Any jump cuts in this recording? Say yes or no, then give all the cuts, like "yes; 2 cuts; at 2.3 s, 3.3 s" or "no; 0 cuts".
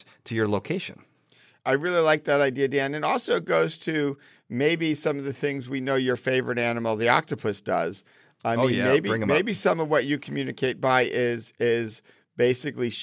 no; 0 cuts